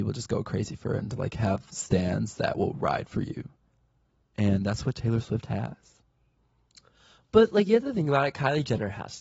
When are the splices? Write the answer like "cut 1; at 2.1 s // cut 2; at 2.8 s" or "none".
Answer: none